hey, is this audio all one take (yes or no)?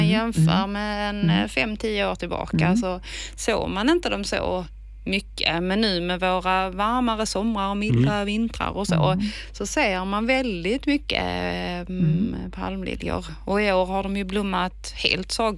yes